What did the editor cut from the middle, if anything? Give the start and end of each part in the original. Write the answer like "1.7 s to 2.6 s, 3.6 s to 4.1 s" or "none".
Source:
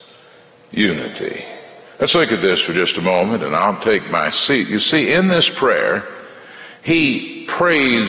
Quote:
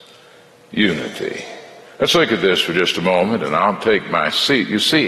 none

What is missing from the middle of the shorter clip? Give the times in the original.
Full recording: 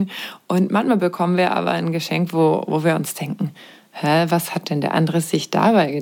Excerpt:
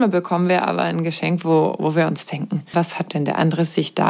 3.6 s to 4.3 s

